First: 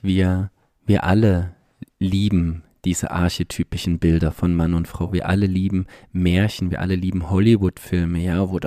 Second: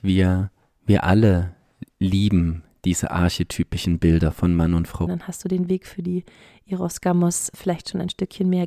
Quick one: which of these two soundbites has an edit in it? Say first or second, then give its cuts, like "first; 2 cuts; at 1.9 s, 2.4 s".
second; 2 cuts; at 5.1 s, 7.5 s